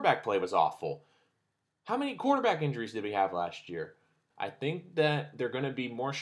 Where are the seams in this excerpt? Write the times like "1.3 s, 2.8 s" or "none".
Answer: 4.3 s